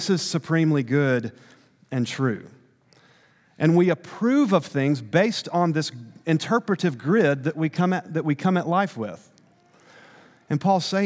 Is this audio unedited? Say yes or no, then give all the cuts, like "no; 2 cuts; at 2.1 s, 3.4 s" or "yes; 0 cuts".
yes; 0 cuts